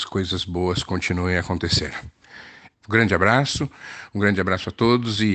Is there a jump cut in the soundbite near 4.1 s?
no; 1 cut; at 2.7 s

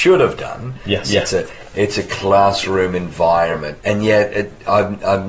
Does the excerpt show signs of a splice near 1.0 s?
yes; 2 cuts; at 1.0 s, 3.8 s

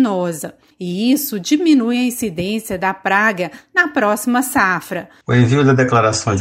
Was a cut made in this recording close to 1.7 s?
no; 1 cut; at 5.2 s

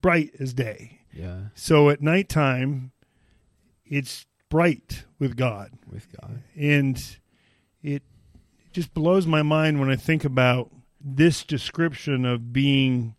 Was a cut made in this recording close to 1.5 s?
no; 1 cut; at 11.0 s

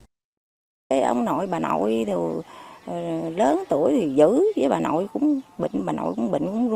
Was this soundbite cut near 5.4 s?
yes; 1 cut; at 5.4 s

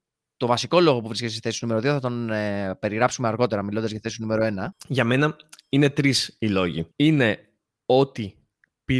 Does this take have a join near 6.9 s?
yes; 1 cut; at 6.9 s

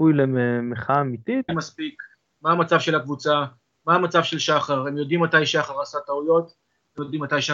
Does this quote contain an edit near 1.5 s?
yes; 1 cut; at 1.5 s

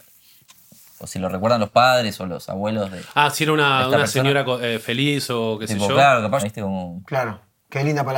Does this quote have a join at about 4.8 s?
no; 1 cut; at 6.4 s

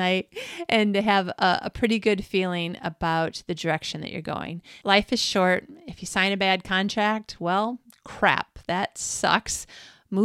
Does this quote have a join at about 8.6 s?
no; 1 cut; at 4.8 s

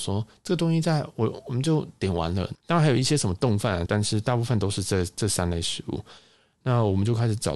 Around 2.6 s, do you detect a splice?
yes; 2 cuts; at 2.6 s, 3.9 s

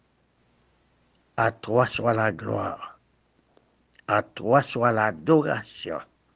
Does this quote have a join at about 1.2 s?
no; 1 cut; at 4.0 s

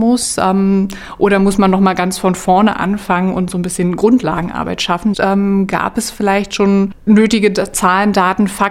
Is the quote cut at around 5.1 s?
yes; 1 cut; at 5.1 s

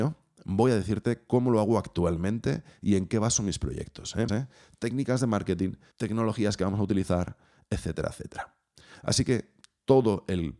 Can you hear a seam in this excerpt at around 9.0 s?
no; 2 cuts; at 4.3 s, 5.9 s

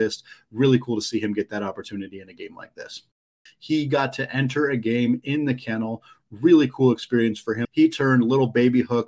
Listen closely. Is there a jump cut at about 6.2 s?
no; 2 cuts; at 3.5 s, 7.6 s

